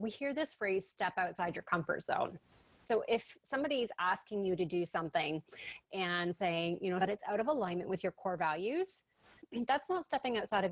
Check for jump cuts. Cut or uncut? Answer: cut